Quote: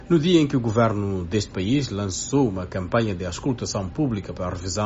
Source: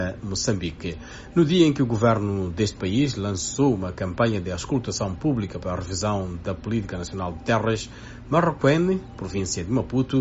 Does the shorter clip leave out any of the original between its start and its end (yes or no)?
no